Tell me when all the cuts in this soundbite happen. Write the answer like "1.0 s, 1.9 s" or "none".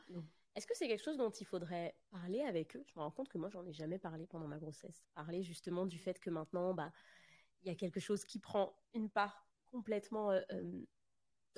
5.0 s